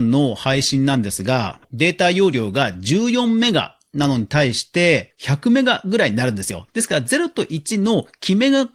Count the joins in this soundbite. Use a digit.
2